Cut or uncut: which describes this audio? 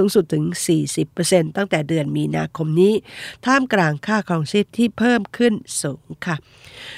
uncut